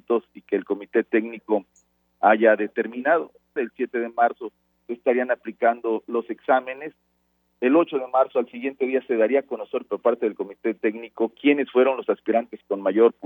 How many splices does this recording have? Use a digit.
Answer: 1